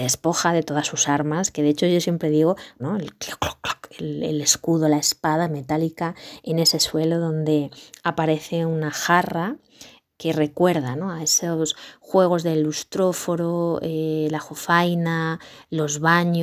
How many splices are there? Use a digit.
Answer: 1